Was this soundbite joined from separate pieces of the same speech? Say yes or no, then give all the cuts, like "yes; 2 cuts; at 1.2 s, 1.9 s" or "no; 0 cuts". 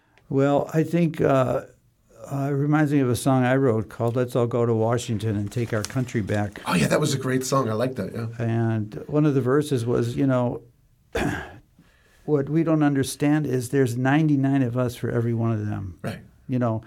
no; 0 cuts